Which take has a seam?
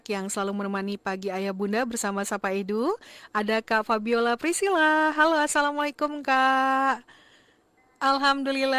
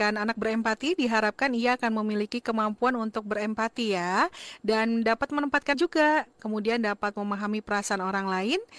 second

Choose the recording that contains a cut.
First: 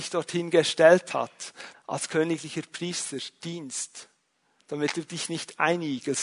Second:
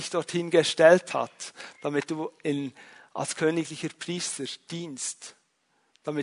first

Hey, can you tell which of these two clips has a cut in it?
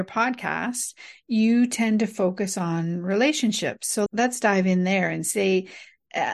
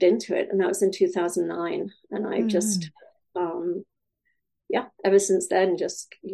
first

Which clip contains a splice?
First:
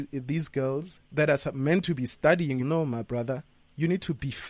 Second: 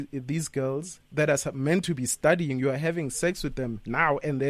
first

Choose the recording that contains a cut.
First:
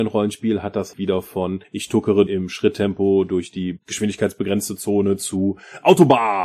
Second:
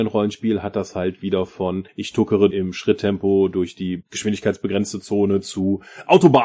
first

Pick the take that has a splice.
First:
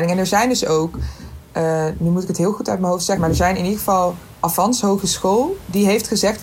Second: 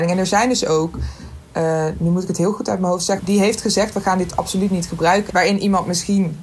second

